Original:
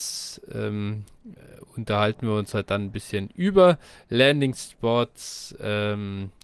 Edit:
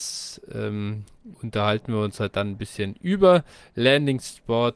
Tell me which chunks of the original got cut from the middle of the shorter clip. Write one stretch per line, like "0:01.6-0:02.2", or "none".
0:01.3-0:01.7

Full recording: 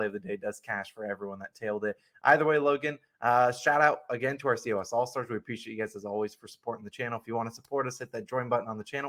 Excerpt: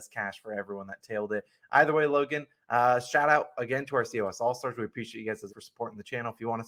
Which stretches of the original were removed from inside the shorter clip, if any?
0:06.0-0:06.4

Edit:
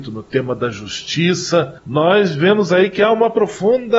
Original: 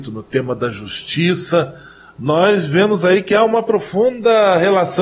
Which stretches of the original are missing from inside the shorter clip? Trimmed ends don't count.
0:01.8-0:02.1

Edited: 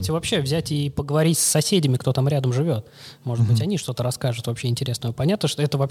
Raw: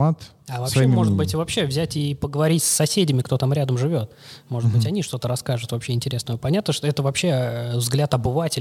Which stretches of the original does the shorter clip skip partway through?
none

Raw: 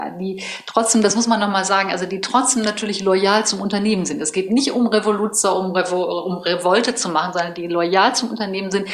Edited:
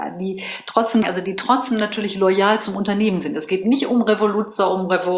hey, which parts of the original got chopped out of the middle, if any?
0:01.0-0:01.9

